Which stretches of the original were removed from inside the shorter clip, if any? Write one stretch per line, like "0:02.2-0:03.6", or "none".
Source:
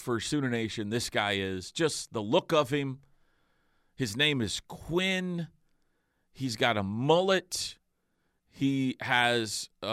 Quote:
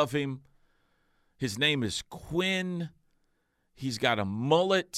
none